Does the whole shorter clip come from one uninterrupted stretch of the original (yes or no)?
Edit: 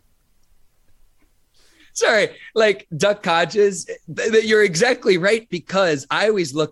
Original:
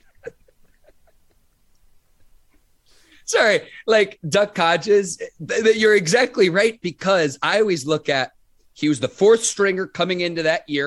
yes